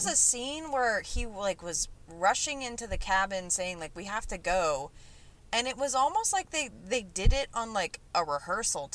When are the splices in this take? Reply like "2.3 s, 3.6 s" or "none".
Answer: none